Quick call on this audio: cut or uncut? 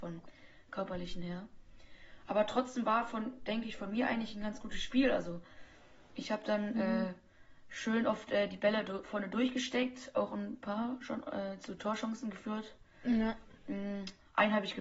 uncut